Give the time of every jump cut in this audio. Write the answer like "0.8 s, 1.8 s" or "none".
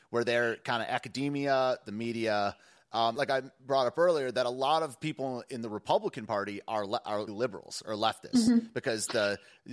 3.1 s, 7.3 s